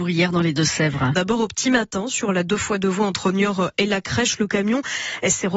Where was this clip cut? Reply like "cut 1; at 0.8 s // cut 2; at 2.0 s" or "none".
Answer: cut 1; at 1.1 s

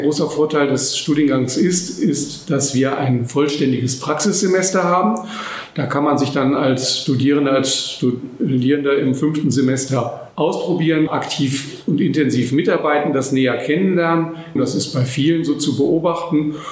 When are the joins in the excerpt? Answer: cut 1; at 11.1 s // cut 2; at 14.6 s

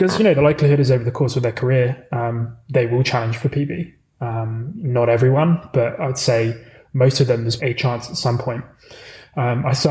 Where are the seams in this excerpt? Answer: cut 1; at 7.6 s

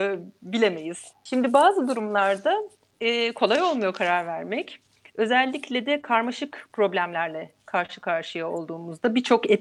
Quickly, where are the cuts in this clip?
cut 1; at 1.1 s

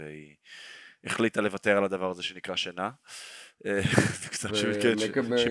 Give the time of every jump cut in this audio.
cut 1; at 4.5 s

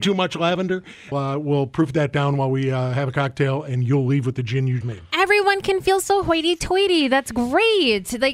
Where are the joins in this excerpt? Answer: cut 1; at 1.1 s // cut 2; at 4.8 s

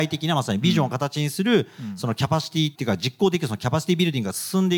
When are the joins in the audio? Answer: cut 1; at 2.7 s

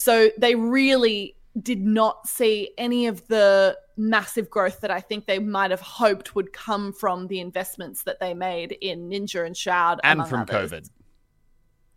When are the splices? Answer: none

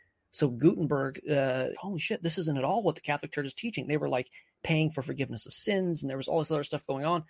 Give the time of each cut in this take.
cut 1; at 1.7 s

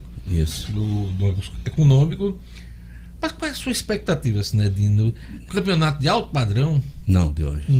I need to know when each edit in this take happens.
cut 1; at 5.5 s

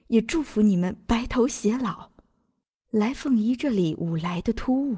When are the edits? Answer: none

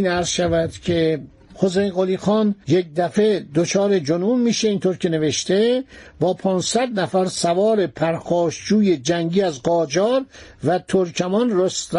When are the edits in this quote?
cut 1; at 2.6 s

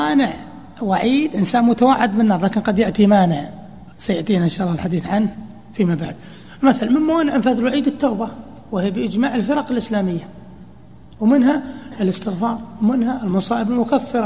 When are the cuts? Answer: cut 1; at 3.9 s

